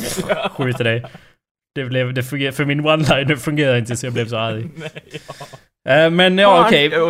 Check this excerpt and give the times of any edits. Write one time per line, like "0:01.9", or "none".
none